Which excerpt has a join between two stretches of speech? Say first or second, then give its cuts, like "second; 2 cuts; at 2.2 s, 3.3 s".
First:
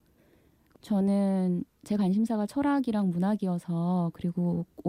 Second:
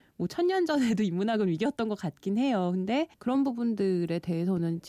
second; 1 cut; at 3.1 s